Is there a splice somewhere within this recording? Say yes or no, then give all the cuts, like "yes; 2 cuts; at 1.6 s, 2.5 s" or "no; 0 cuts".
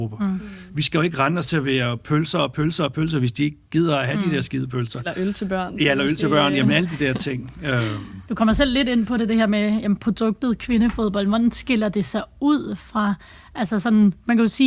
no; 0 cuts